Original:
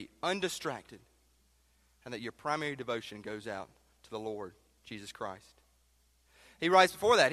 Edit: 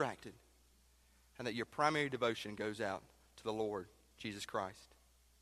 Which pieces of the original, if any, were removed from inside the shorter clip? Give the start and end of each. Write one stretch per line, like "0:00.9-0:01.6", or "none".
none